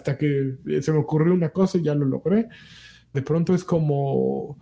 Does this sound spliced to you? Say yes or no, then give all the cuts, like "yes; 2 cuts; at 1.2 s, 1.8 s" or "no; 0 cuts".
yes; 1 cut; at 3.1 s